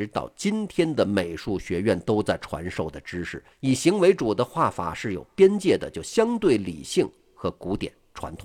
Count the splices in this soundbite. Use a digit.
1